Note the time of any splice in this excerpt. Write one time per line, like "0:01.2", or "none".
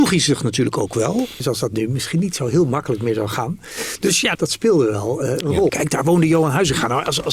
0:01.4
0:04.4
0:05.7